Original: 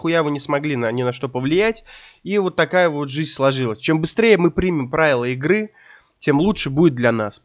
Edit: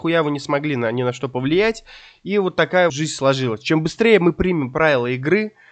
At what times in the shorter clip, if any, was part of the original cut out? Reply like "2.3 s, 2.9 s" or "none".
2.9 s